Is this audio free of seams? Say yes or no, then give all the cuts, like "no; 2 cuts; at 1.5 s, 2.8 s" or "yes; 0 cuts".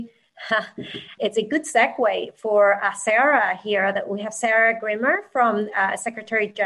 no; 1 cut; at 1.2 s